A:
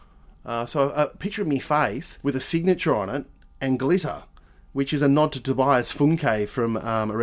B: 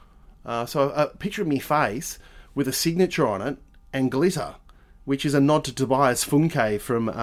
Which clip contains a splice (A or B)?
A